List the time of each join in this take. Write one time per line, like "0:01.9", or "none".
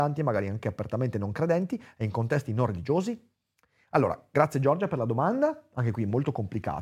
none